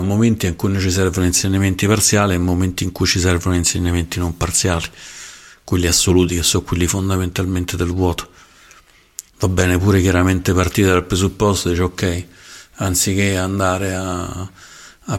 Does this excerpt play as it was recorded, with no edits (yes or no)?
no